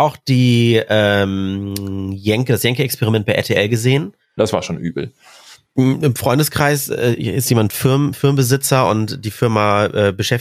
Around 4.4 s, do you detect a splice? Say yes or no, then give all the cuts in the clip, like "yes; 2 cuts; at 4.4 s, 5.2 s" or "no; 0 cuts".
yes; 1 cut; at 4.4 s